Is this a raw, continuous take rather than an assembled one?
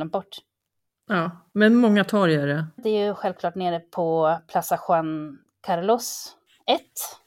no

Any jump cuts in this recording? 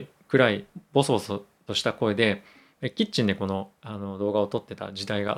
no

